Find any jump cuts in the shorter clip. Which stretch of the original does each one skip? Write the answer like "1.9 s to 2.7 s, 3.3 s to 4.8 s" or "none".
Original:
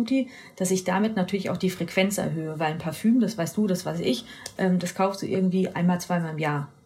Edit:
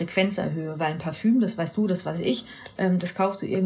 none